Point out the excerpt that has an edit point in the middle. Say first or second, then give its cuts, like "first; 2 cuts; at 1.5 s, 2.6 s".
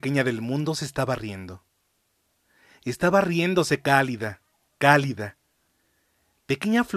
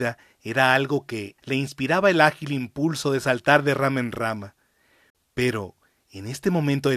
second; 1 cut; at 1.4 s